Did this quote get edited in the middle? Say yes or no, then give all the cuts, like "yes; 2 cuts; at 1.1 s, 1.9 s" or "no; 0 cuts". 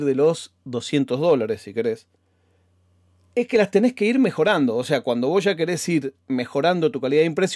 no; 0 cuts